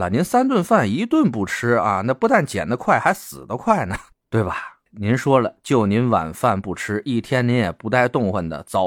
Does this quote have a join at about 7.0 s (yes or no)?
no